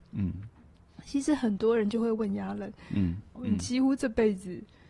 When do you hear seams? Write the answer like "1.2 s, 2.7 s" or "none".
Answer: 3.3 s